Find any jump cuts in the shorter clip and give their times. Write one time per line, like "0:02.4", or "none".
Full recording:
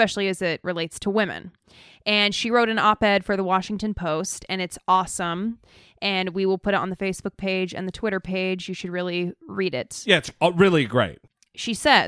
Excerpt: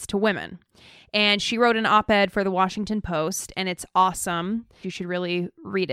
0:04.8

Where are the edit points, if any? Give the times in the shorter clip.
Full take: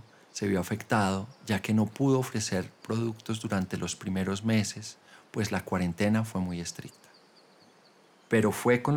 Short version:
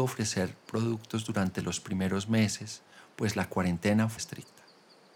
0:04.2

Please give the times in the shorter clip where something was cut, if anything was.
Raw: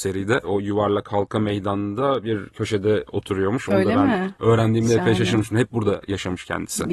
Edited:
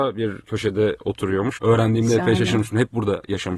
0:01.6

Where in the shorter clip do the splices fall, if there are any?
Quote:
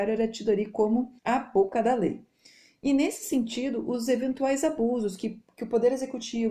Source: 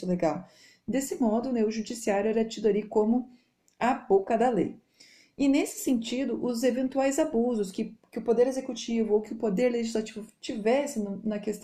0:01.2

